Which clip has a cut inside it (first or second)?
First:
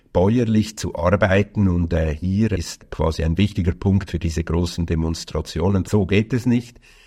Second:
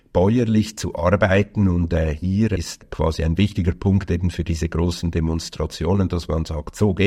first